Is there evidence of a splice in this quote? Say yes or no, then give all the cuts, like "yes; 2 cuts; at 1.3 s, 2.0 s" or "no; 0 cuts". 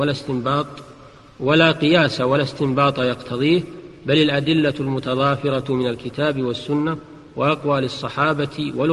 no; 0 cuts